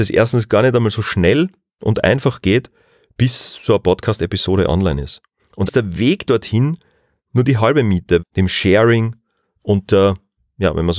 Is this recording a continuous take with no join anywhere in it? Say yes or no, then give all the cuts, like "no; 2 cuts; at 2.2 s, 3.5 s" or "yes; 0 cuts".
no; 2 cuts; at 5.7 s, 8.2 s